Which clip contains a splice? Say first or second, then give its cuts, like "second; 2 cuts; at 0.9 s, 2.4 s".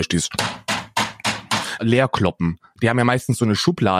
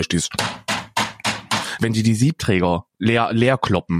first; 1 cut; at 1.8 s